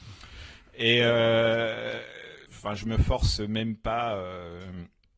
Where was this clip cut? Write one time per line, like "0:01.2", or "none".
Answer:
0:02.5